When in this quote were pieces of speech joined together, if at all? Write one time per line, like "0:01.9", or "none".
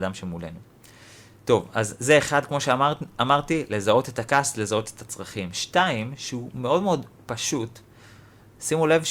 none

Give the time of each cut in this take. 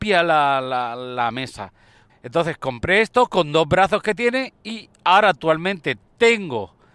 0:02.1

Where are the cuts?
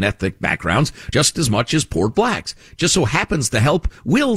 none

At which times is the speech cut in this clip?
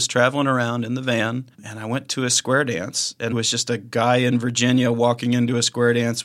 0:01.5
0:03.3

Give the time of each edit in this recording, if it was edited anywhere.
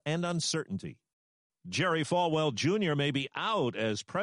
none

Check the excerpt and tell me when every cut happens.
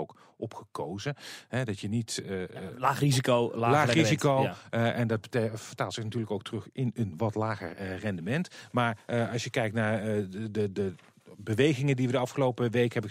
none

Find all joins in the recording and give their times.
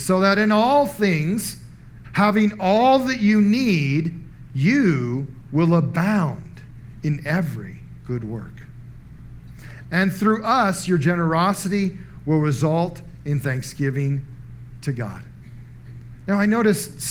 0:02.0
0:09.8

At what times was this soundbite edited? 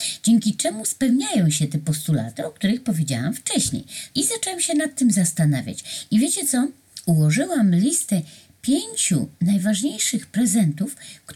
0:04.1

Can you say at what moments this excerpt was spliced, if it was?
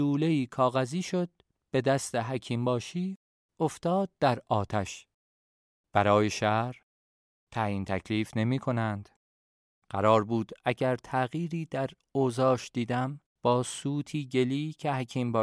0:09.7
0:13.3

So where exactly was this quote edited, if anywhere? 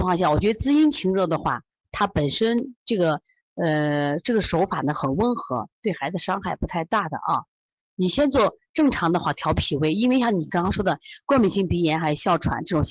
none

